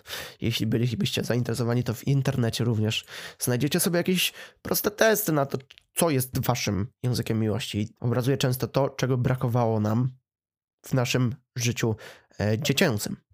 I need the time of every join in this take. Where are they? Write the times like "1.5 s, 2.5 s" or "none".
8.0 s